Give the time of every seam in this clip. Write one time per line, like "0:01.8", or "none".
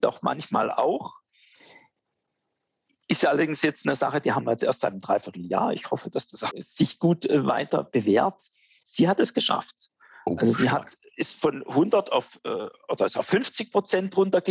0:06.5
0:08.8